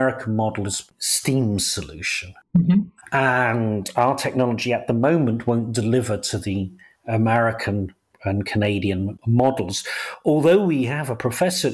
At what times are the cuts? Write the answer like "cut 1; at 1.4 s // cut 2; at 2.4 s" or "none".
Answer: none